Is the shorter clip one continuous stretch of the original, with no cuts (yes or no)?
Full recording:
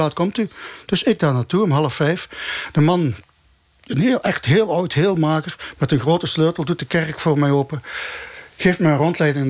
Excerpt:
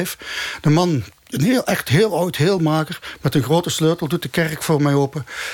no